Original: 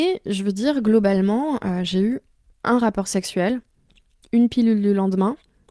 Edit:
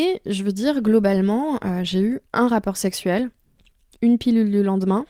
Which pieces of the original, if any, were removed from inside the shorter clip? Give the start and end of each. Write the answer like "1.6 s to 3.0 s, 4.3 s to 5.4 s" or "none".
2.3 s to 2.6 s

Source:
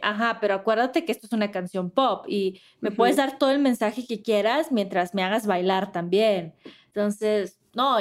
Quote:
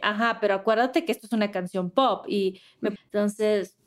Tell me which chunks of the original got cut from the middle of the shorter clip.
3.0 s to 6.8 s

